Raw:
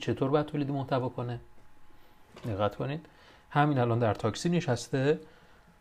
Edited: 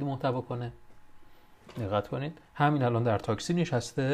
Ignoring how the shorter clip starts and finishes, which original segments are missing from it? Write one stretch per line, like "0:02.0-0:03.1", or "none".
0:03.1-0:03.4